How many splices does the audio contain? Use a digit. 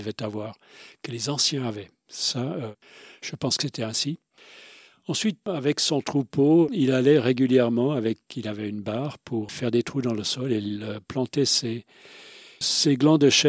1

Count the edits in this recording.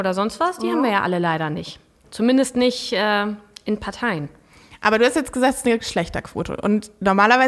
0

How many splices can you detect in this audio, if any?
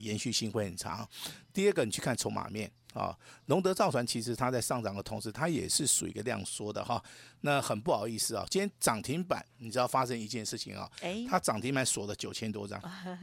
0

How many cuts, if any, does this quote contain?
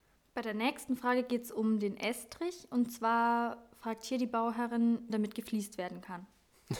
1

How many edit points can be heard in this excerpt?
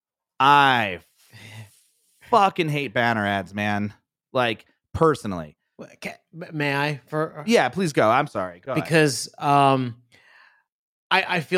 0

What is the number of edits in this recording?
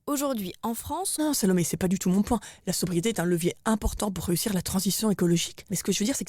1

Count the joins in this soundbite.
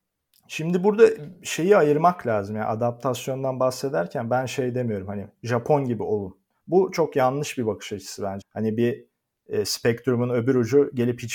1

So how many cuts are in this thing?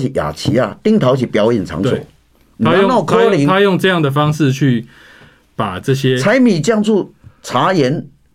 0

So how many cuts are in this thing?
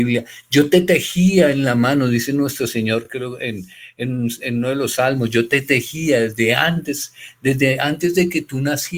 0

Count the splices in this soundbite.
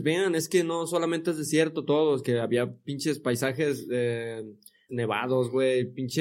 1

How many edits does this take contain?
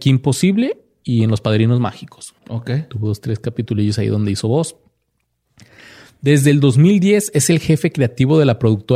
1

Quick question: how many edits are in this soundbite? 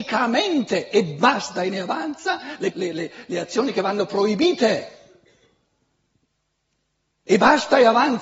1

